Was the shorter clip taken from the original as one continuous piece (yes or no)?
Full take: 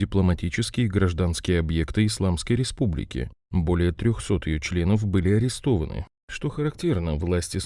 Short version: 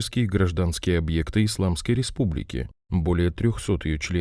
yes